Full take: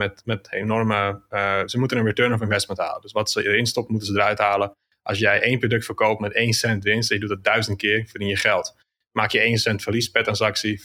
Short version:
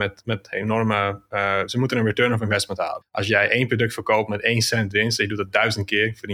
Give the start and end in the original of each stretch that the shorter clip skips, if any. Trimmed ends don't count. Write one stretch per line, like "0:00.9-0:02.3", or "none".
0:03.0-0:04.9